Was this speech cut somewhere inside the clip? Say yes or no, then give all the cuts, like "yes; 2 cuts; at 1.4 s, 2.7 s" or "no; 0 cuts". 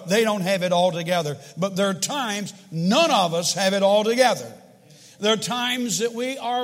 no; 0 cuts